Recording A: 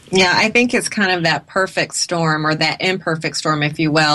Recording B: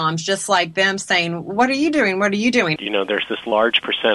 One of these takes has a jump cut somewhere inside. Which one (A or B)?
B